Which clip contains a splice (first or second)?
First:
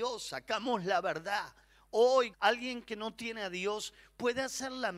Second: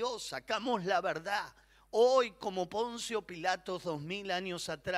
first